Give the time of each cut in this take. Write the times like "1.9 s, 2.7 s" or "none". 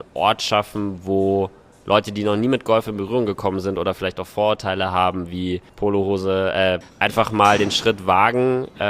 5.7 s, 6.8 s